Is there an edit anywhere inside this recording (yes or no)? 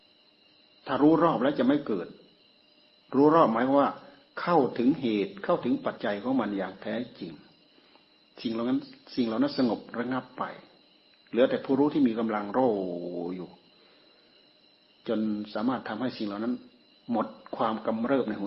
yes